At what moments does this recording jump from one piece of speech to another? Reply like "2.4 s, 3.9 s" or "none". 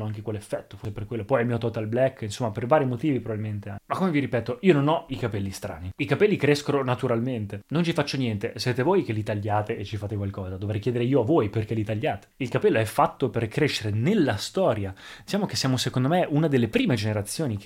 none